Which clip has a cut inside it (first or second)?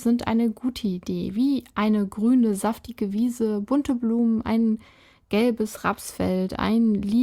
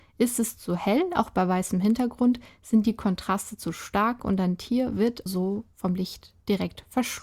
second